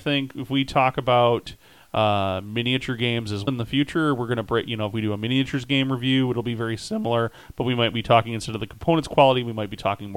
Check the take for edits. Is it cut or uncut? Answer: cut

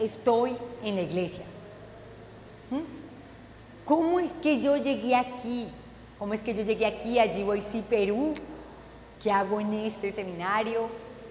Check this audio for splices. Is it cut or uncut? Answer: cut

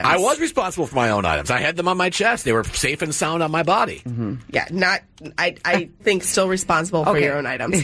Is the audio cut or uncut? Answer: cut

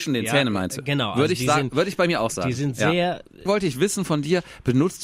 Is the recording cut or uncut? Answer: cut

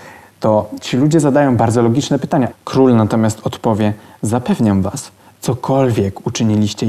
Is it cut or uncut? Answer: cut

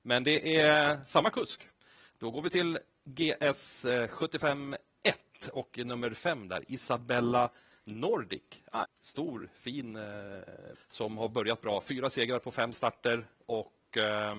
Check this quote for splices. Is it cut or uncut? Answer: cut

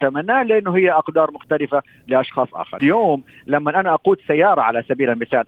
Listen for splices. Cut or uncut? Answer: cut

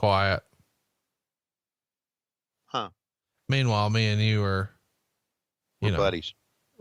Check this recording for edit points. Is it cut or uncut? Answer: uncut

